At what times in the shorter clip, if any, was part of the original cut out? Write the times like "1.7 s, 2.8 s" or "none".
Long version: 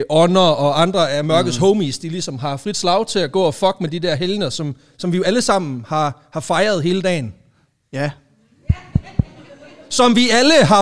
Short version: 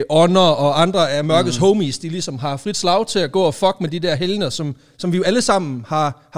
none